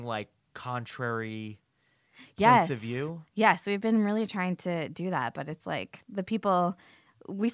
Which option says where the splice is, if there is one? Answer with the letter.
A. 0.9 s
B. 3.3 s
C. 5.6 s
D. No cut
D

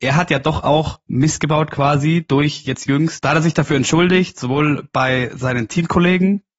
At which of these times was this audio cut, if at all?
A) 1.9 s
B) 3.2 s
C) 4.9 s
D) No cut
B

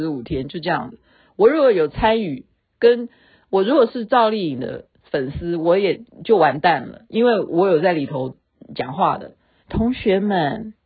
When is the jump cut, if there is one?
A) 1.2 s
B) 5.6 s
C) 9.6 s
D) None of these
C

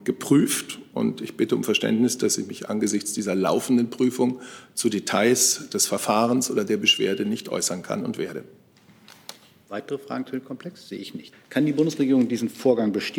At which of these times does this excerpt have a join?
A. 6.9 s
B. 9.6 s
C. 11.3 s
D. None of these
C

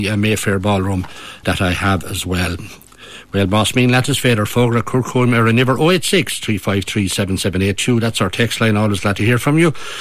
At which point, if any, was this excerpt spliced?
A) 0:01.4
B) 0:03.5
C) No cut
A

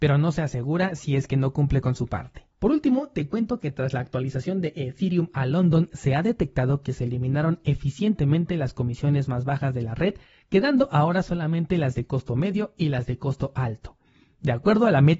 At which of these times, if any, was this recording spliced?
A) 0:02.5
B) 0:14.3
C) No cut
A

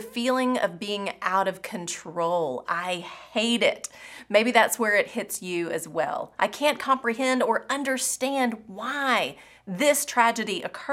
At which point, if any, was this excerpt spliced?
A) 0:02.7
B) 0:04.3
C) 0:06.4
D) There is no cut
C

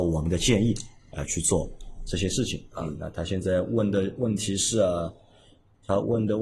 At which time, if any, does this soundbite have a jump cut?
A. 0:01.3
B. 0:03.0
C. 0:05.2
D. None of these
D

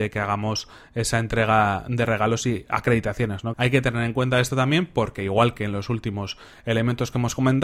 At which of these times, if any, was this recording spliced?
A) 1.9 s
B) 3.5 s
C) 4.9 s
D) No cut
B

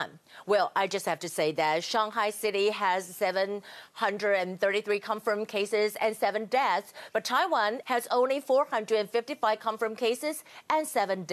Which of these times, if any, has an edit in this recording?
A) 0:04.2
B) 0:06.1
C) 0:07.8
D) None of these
C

